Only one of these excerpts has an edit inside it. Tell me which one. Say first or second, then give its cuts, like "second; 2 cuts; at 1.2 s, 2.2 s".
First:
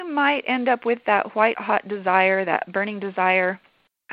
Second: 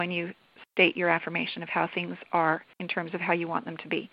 second; 1 cut; at 2.7 s